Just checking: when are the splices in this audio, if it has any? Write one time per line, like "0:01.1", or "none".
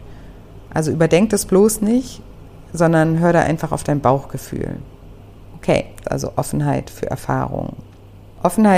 0:06.0